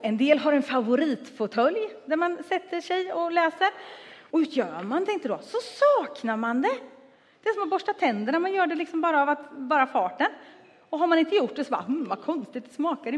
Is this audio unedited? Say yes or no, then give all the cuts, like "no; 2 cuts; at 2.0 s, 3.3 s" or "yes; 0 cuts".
no; 1 cut; at 4.3 s